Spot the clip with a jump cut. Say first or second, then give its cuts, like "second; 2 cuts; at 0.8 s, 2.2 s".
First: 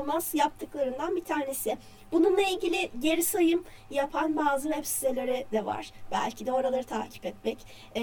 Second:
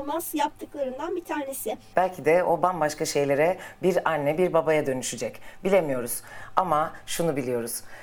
second; 1 cut; at 1.9 s